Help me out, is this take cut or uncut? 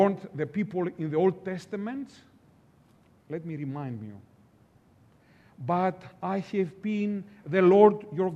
uncut